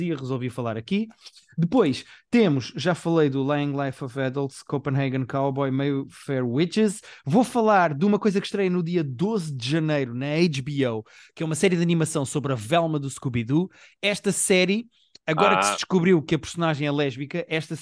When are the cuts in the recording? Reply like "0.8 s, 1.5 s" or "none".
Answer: none